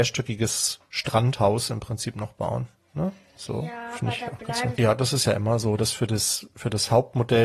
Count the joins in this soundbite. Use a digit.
1